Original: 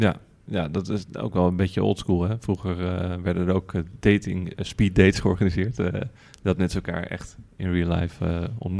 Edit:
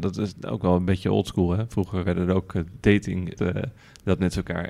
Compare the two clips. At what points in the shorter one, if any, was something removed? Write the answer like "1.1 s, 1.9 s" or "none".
2.0 s, 3.4 s